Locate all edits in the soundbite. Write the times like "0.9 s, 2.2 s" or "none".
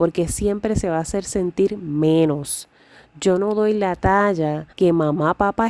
4.7 s